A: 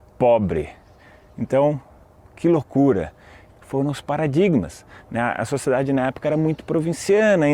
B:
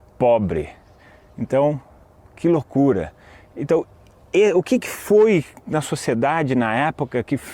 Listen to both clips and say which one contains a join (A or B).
A